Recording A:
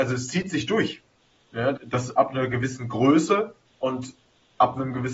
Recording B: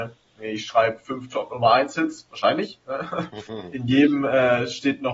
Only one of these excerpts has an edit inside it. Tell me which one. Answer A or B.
A